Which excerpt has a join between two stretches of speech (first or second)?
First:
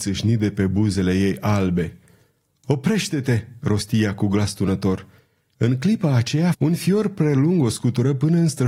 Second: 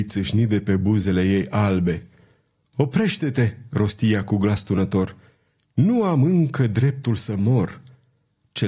first